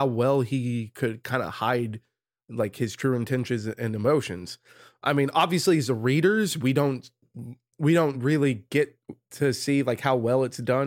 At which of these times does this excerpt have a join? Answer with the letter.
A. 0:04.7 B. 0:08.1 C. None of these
C